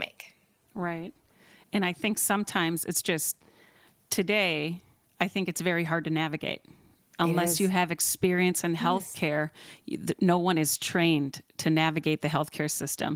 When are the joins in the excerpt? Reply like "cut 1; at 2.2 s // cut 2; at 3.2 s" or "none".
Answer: none